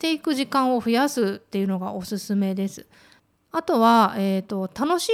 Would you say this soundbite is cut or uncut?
uncut